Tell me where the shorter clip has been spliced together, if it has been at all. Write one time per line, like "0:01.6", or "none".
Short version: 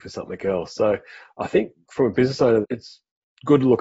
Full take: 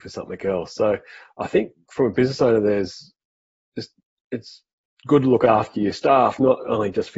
0:02.6